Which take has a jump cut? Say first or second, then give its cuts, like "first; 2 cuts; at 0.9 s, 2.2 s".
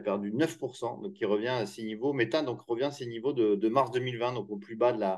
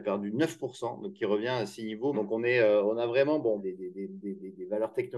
second; 2 cuts; at 2.1 s, 3.6 s